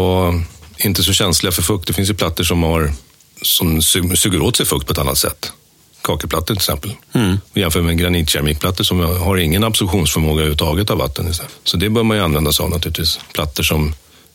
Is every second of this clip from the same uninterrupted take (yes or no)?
yes